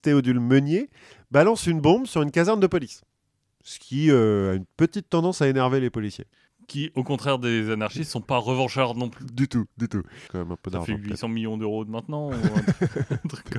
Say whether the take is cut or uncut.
cut